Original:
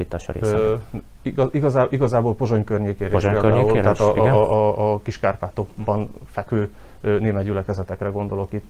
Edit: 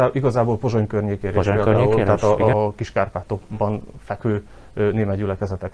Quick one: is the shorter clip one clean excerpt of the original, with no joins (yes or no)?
no